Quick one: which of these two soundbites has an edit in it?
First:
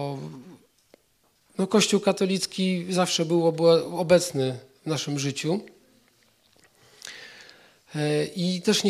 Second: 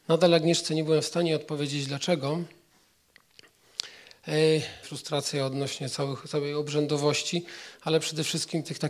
second; 1 cut; at 4.8 s

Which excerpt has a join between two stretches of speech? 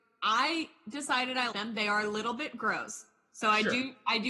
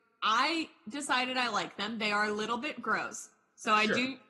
first; 1 cut; at 1.5 s

